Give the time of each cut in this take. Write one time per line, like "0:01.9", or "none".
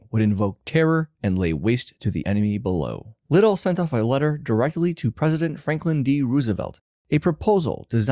0:03.2